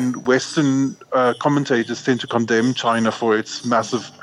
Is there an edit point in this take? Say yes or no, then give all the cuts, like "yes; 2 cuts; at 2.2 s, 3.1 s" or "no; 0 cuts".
no; 0 cuts